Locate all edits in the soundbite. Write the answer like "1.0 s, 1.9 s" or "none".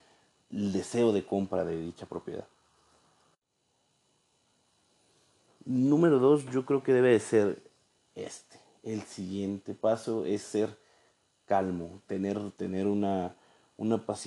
none